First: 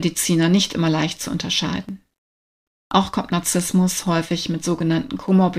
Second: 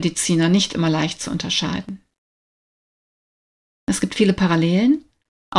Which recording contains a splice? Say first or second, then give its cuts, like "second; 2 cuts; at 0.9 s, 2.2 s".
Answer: first; 1 cut; at 2.7 s